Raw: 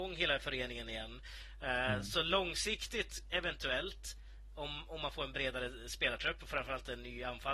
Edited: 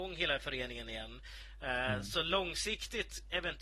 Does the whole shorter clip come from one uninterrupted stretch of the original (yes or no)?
yes